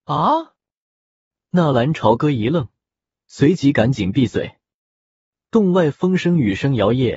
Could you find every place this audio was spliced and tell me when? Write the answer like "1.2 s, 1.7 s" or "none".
none